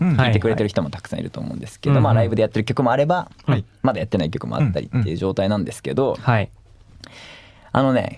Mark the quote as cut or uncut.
uncut